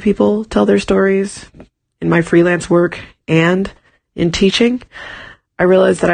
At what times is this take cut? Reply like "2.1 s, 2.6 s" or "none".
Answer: none